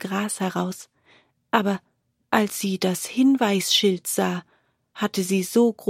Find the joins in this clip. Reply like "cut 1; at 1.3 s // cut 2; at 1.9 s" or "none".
none